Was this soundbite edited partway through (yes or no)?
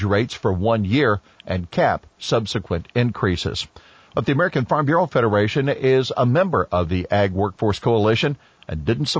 no